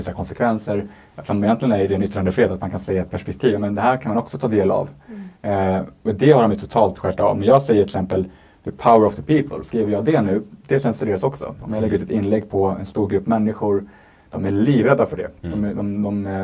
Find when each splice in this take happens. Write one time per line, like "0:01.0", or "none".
none